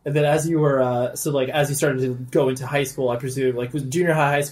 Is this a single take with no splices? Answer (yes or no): yes